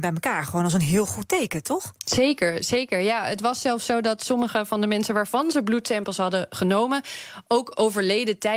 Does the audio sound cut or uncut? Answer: uncut